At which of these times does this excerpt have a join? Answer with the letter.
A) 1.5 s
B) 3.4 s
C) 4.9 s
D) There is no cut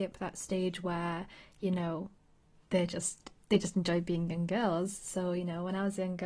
D